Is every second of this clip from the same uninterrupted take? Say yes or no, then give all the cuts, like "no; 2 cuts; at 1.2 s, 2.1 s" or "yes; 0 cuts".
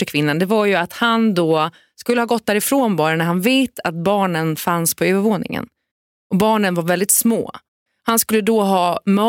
yes; 0 cuts